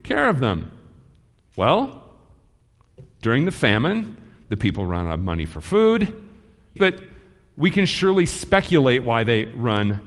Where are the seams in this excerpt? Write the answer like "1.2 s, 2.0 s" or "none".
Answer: 6.8 s